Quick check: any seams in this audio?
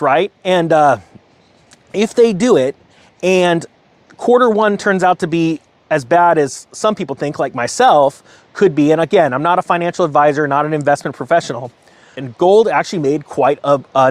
yes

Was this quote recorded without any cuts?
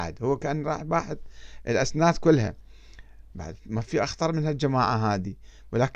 no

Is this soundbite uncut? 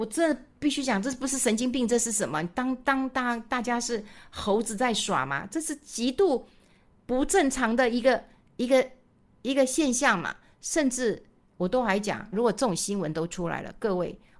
no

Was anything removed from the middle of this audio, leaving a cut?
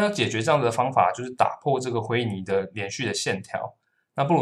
no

